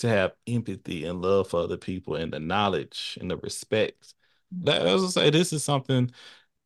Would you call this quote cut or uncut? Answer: cut